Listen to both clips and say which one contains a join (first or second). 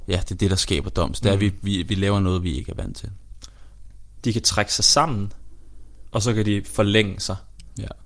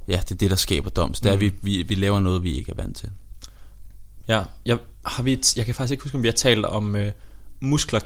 first